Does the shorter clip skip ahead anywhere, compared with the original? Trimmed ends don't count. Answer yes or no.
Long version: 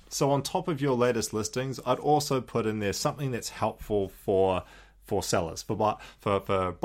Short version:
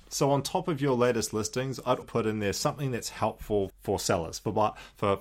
yes